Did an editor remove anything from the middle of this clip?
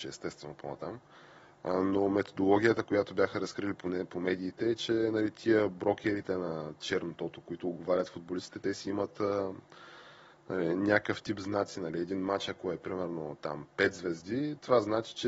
no; 0 cuts

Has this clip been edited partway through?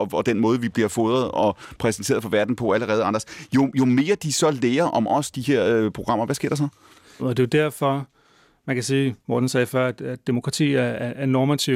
yes; 2 cuts; at 7.2 s, 9.2 s

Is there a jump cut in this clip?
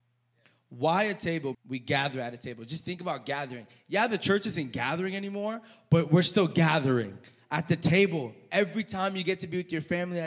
yes; 1 cut; at 1.5 s

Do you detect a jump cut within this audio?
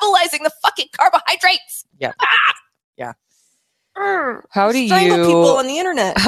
no; 0 cuts

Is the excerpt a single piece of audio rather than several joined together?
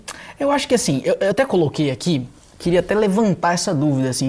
yes; 0 cuts

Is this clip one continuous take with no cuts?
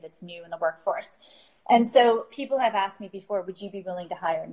yes; 0 cuts

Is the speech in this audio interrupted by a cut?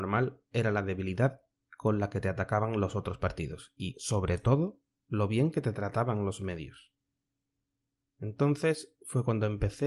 no; 0 cuts

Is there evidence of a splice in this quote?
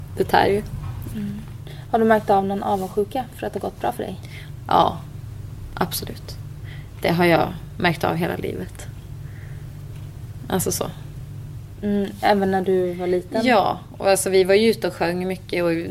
yes; 1 cut; at 1.1 s

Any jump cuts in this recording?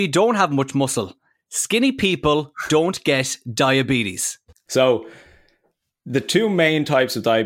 yes; 1 cut; at 4.7 s

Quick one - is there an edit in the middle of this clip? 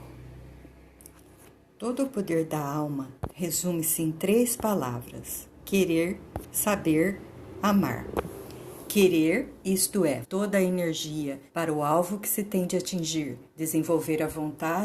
yes; 3 cuts; at 10.2 s, 11.5 s, 13.5 s

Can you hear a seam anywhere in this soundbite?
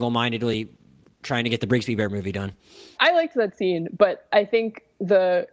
yes; 1 cut; at 2.9 s

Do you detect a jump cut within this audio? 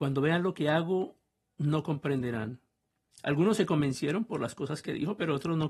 yes; 1 cut; at 3.1 s

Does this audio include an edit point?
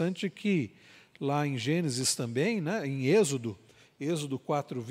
no; 0 cuts

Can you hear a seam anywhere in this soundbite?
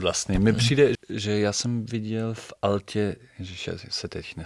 yes; 1 cut; at 1.0 s

